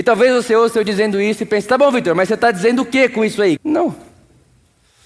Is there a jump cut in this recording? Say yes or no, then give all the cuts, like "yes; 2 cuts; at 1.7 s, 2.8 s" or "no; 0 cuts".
yes; 1 cut; at 3.6 s